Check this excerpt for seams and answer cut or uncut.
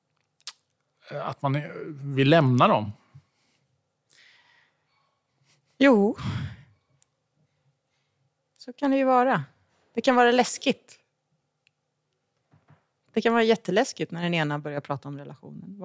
uncut